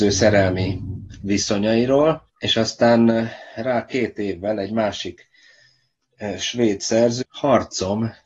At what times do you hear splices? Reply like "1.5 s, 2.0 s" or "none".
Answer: 2.3 s, 7.2 s